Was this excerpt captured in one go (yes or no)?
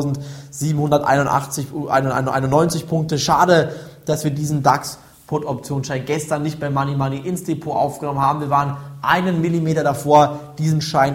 yes